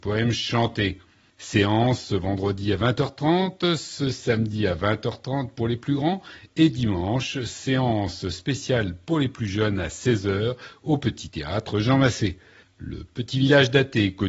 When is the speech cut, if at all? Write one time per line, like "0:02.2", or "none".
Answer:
0:12.6

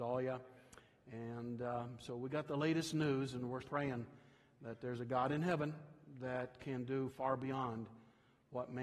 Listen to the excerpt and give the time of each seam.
0:03.6

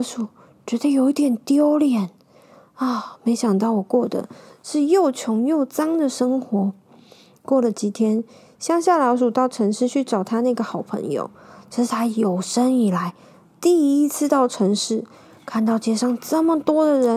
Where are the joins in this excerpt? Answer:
none

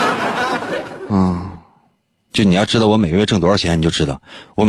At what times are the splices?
none

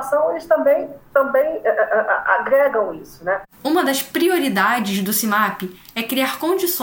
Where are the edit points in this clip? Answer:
none

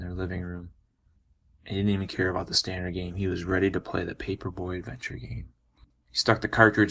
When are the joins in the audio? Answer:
none

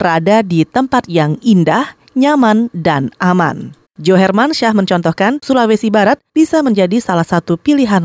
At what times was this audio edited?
0:03.8
0:05.4

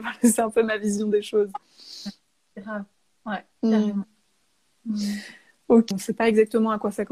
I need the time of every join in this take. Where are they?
0:05.9

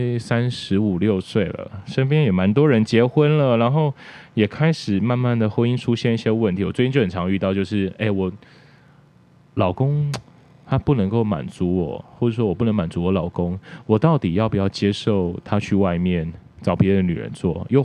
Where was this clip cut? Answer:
none

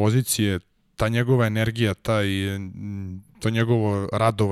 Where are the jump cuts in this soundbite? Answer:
none

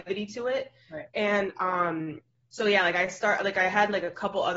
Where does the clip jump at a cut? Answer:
none

